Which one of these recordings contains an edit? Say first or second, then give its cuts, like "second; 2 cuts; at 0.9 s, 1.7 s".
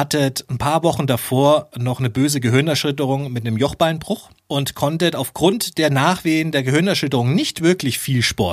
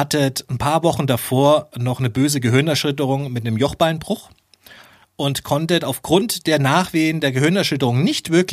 first; 1 cut; at 4.4 s